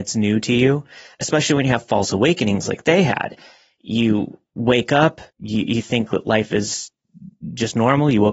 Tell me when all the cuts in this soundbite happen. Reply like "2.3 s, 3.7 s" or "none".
5.3 s